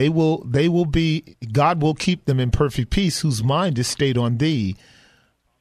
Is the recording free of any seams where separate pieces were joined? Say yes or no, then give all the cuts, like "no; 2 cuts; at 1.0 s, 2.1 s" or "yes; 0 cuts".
yes; 0 cuts